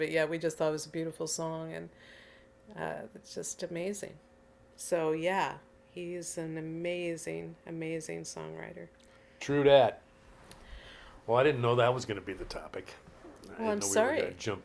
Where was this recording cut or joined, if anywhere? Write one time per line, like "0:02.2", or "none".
none